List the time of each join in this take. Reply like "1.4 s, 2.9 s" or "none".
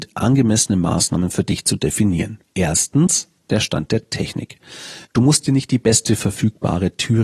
2.5 s, 5.0 s